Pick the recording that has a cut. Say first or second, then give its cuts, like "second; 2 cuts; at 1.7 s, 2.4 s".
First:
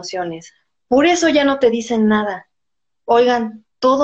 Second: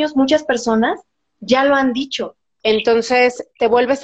second; 1 cut; at 2.6 s